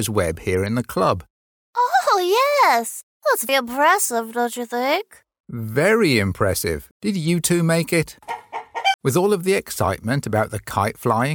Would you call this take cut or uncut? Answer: cut